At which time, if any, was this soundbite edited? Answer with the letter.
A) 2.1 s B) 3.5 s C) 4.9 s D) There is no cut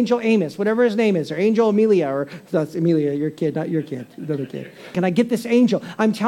C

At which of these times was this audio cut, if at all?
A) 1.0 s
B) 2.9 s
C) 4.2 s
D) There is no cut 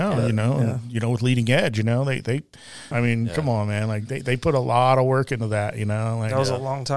B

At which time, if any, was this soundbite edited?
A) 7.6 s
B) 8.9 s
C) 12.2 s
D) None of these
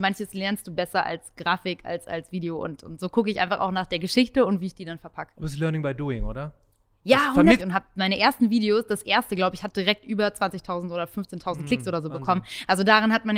A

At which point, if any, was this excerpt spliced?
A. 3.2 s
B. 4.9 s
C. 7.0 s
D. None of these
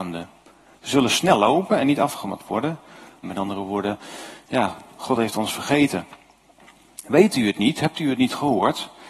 A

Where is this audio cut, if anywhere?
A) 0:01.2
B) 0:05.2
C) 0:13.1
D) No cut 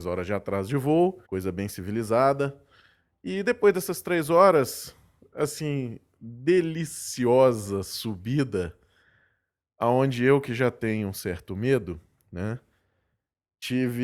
A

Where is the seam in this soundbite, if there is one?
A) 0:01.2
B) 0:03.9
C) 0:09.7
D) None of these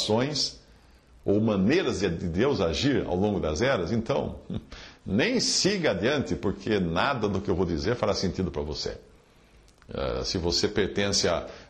D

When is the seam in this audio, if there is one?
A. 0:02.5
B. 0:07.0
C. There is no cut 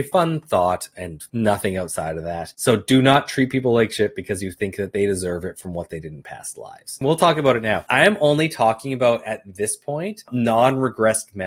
B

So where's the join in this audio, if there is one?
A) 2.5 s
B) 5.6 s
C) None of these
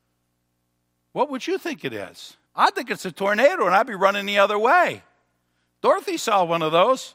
A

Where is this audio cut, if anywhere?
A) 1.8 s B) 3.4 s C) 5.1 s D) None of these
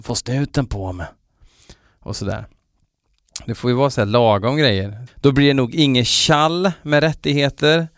C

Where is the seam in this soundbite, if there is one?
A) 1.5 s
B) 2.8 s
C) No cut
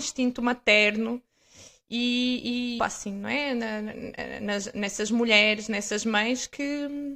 B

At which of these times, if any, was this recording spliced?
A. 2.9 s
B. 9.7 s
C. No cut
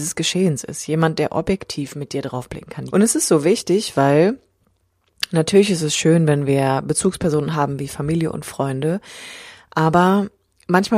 A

